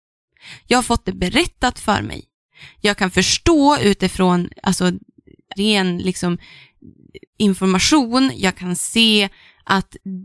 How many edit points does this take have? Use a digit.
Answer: 2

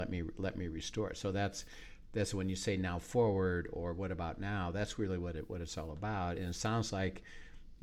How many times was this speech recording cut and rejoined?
0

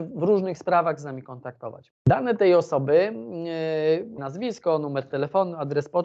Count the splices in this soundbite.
2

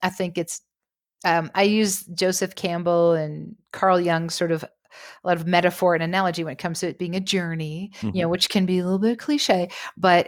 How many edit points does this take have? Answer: 0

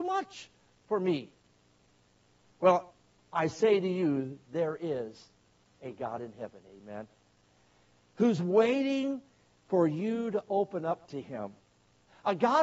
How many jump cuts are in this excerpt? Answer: 0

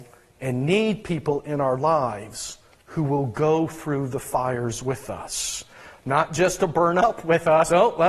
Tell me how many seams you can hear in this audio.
0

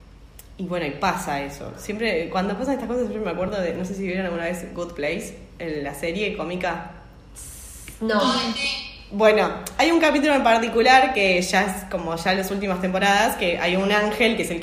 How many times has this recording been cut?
0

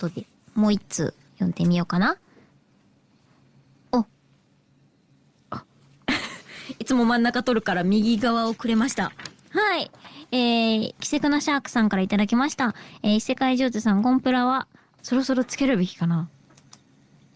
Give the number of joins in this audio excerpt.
2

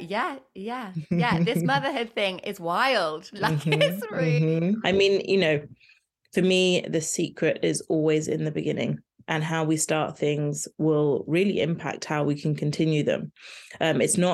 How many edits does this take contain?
1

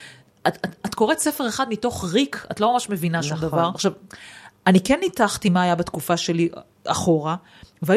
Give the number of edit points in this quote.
1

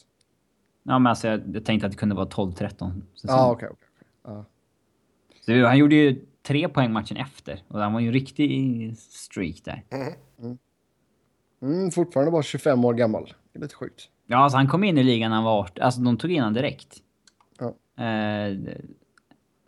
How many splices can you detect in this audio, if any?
0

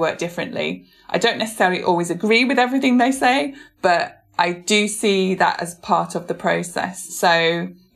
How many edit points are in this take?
0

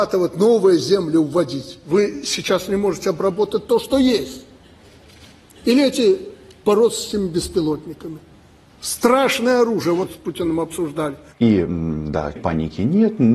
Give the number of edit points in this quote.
2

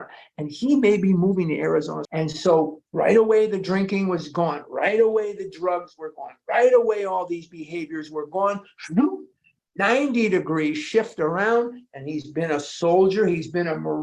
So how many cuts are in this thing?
1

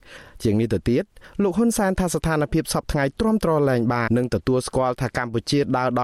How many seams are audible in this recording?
1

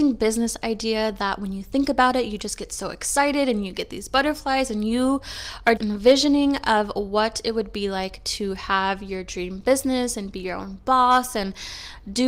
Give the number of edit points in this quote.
1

